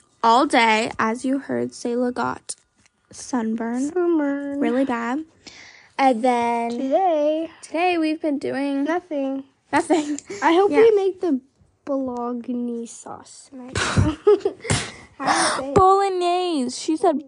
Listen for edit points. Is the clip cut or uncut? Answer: uncut